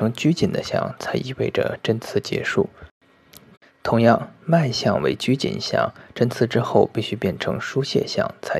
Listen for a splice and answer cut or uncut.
uncut